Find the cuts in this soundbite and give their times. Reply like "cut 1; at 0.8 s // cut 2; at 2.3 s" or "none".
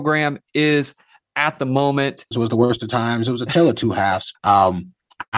cut 1; at 2.3 s // cut 2; at 4.3 s